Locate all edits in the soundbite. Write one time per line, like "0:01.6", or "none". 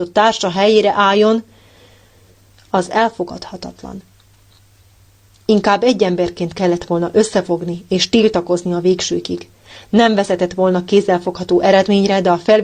none